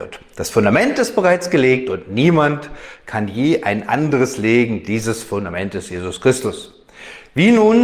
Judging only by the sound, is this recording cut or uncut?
uncut